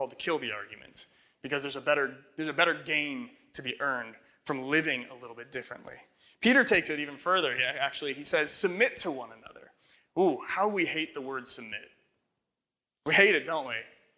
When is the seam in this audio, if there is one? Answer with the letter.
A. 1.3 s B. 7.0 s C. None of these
C